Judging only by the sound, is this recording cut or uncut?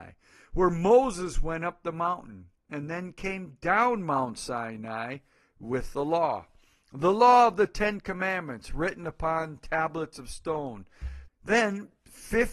cut